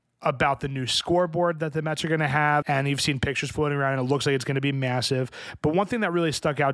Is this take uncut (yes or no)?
no